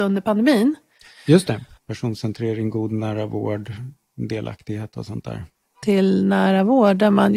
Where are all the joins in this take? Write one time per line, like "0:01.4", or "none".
0:01.8
0:05.8